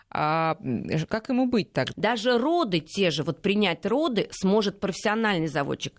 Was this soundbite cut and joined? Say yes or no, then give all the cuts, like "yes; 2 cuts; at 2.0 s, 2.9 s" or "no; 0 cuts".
yes; 1 cut; at 1.9 s